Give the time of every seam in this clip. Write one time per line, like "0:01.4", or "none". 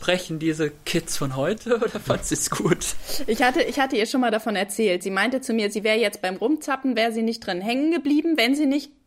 none